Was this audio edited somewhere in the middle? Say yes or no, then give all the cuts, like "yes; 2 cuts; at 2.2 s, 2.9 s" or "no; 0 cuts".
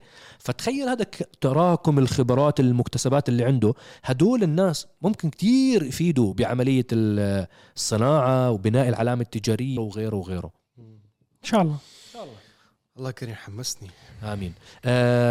yes; 1 cut; at 9.8 s